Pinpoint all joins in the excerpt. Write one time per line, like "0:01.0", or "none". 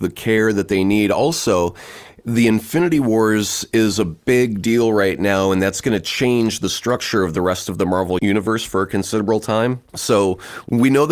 none